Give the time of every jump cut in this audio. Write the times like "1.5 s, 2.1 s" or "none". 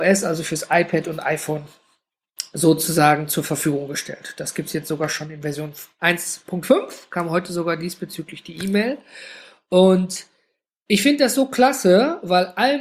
none